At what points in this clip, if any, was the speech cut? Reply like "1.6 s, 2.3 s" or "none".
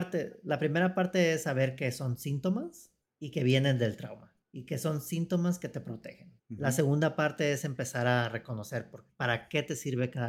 6.4 s, 9.1 s